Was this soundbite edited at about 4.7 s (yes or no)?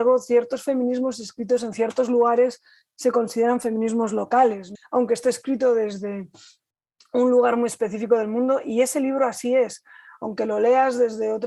yes